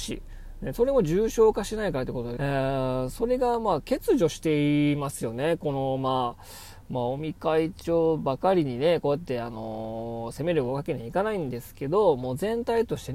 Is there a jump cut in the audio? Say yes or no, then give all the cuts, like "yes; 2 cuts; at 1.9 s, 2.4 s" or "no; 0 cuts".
yes; 1 cut; at 2.4 s